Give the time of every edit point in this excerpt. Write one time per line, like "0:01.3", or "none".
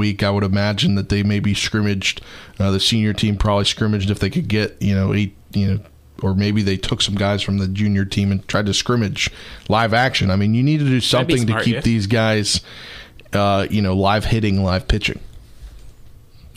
none

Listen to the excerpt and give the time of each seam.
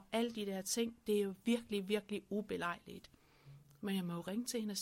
none

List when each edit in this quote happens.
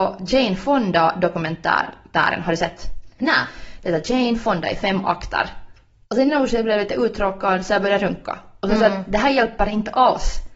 none

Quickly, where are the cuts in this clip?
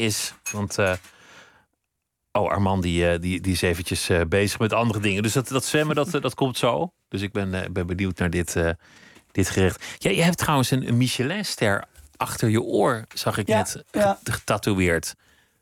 none

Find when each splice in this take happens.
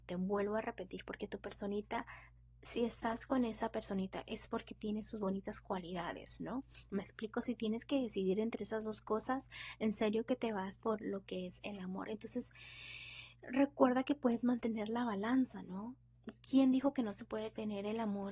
0:06.9

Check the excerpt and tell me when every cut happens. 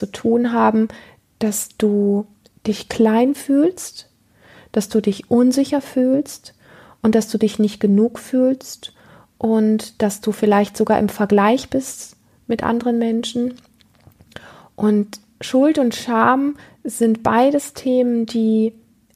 none

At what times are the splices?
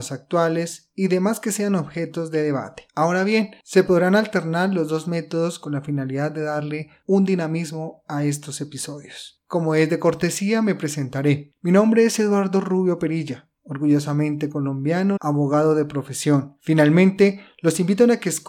0:15.2
0:16.6

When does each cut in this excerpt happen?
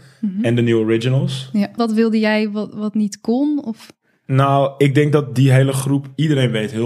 0:01.8

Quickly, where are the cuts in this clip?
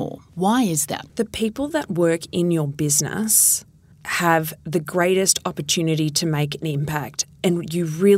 0:01.1

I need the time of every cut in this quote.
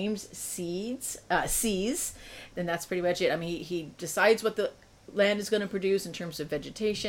0:02.5

